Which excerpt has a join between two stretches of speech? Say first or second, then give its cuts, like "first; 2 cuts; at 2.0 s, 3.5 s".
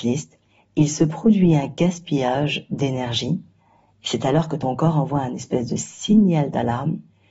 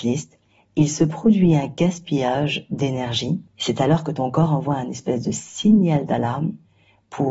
second; 1 cut; at 3.5 s